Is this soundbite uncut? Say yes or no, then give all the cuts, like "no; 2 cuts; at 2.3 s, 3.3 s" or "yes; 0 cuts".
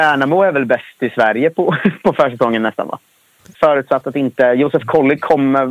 no; 1 cut; at 3.5 s